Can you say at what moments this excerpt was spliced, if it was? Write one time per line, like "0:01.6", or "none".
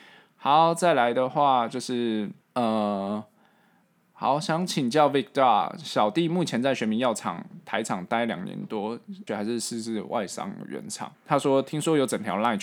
0:02.4
0:09.3
0:11.1